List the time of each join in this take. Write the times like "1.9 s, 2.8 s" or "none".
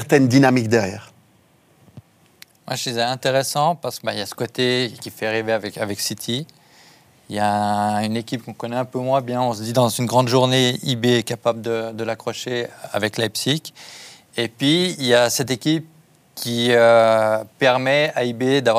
none